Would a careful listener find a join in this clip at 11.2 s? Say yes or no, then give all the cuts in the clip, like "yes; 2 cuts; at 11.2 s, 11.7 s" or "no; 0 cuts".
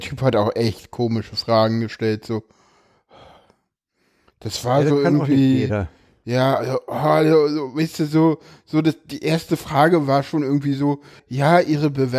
yes; 1 cut; at 11.2 s